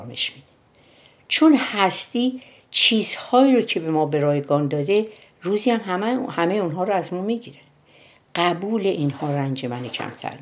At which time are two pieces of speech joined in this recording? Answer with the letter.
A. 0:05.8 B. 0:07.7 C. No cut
C